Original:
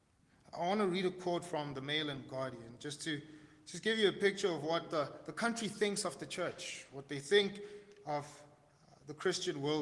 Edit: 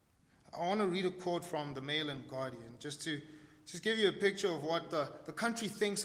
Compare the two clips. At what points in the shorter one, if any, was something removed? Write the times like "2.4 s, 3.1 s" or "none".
none